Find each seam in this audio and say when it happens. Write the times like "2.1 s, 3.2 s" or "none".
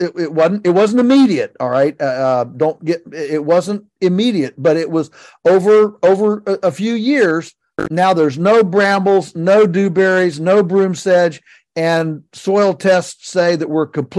none